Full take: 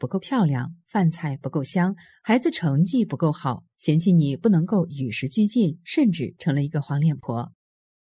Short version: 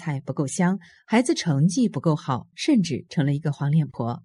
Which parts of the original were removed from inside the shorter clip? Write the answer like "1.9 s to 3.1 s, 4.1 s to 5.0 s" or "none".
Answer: 3.7 s to 5.8 s